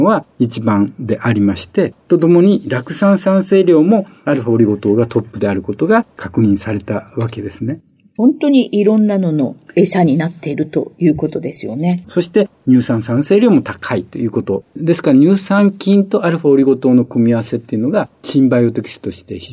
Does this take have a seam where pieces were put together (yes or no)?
yes